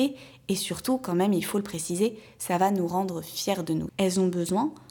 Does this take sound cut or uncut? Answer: cut